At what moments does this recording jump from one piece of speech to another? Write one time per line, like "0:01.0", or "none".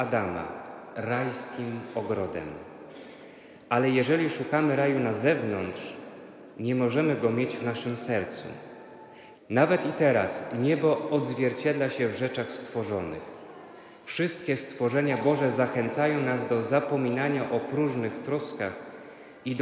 0:09.3